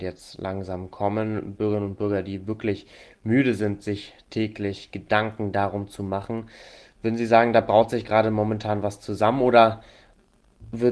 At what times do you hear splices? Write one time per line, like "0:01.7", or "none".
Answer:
0:01.6